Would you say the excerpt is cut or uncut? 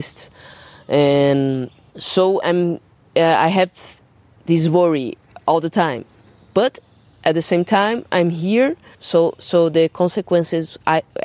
cut